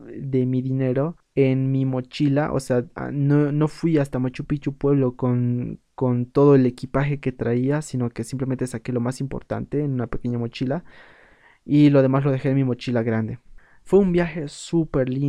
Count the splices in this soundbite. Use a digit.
1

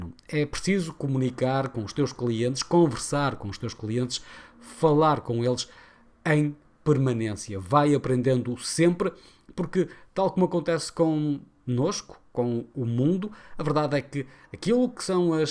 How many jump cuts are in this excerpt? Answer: 0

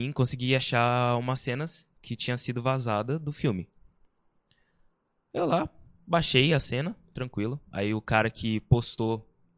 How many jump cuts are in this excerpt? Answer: 0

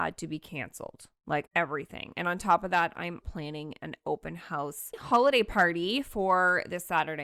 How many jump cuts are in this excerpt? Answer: 2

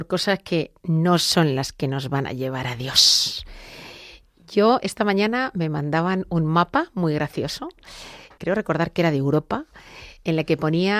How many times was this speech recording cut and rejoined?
1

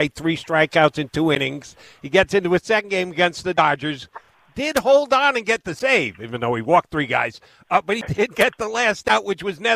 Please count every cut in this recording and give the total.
0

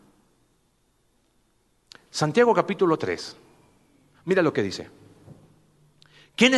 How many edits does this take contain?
0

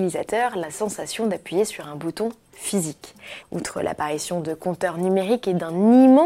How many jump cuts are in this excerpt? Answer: 1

